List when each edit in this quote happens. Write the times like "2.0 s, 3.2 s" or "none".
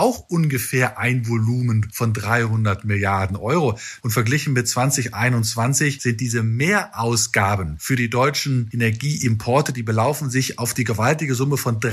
4.0 s